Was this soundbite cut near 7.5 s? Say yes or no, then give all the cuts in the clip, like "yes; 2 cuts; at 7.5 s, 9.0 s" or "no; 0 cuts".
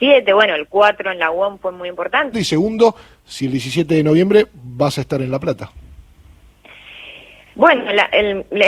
no; 1 cut; at 2.3 s